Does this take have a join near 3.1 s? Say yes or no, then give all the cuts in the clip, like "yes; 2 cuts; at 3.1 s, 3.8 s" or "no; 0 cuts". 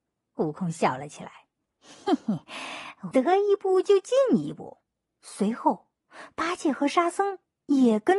yes; 1 cut; at 3.1 s